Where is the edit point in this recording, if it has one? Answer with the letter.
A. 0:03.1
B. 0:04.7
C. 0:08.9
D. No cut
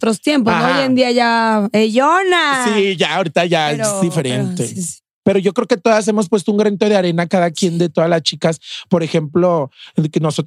B